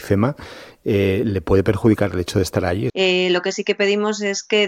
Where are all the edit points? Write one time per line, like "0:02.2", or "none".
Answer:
0:02.9